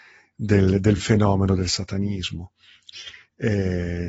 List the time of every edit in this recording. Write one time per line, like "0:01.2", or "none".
none